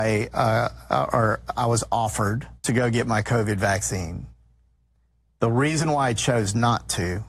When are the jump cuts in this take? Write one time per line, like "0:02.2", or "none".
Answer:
0:02.6